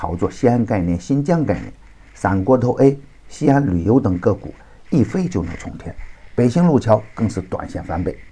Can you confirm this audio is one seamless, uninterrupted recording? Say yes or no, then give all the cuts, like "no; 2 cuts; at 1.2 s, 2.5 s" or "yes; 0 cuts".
yes; 0 cuts